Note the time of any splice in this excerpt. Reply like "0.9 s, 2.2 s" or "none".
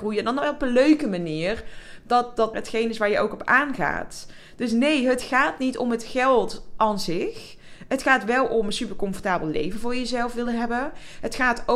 2.5 s